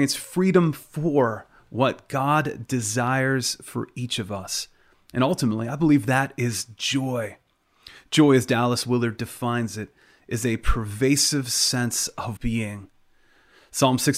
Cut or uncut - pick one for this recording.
cut